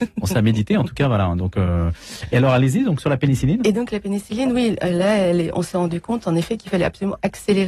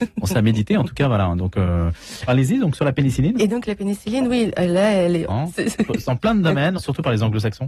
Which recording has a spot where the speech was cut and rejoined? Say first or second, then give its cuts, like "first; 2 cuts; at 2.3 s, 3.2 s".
second; 3 cuts; at 2.3 s, 5.3 s, 6.8 s